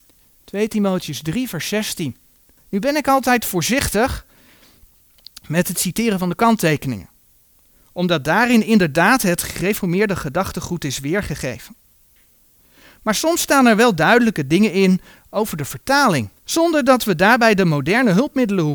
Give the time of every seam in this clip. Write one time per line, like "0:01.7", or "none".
0:02.6
0:16.4